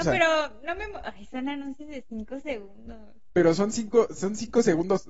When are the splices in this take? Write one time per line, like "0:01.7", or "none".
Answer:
none